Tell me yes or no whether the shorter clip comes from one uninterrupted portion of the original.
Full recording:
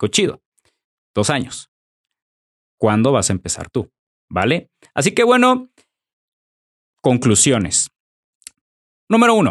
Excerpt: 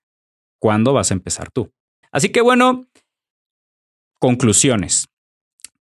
no